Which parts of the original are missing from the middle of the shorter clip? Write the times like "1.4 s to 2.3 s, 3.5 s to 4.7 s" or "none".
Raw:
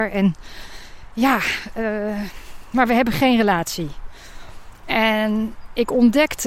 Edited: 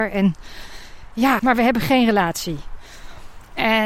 1.4 s to 2.7 s